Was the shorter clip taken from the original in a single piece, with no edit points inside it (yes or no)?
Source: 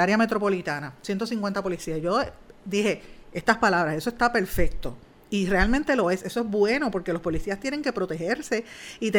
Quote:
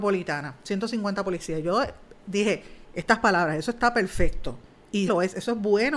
no